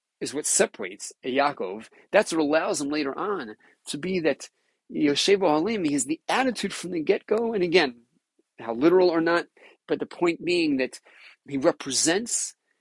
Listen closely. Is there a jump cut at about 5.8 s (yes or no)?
no